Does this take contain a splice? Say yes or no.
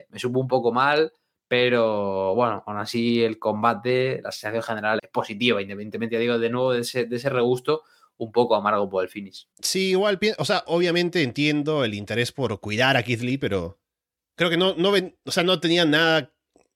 yes